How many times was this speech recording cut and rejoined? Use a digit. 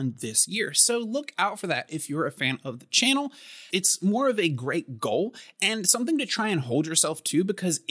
1